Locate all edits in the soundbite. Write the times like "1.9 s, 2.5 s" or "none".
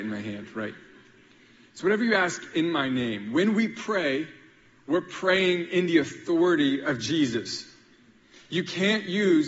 none